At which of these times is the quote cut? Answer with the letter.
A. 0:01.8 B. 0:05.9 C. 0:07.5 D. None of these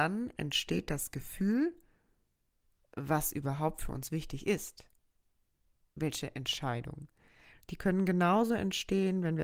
C